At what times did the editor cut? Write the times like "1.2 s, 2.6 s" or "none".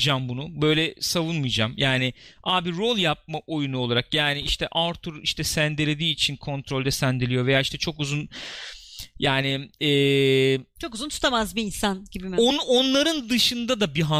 none

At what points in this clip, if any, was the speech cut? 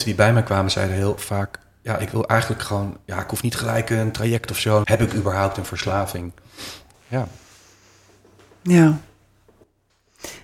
4.8 s, 6.9 s

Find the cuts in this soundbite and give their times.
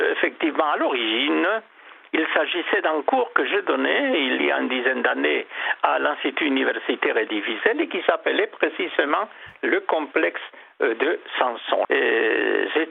11.8 s

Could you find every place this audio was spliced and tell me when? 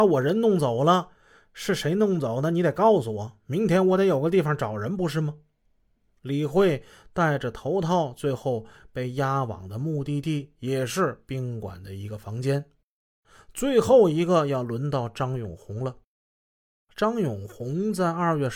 none

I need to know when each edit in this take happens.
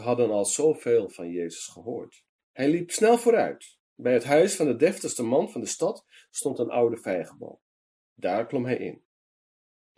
2.4 s

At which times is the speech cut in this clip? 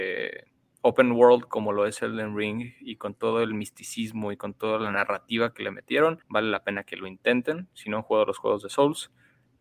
6.2 s

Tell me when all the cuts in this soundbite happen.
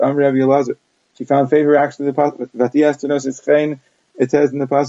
none

